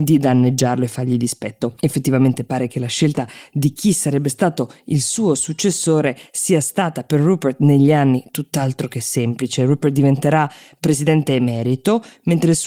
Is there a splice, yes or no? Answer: no